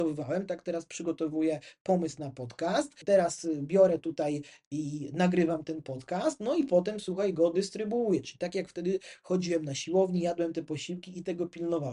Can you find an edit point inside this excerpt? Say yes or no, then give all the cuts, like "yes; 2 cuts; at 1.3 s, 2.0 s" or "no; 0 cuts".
no; 0 cuts